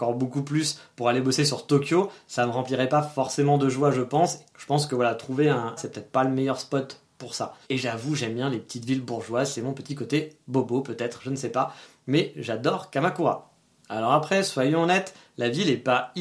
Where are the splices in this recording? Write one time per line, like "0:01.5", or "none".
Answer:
0:04.5
0:05.8
0:07.6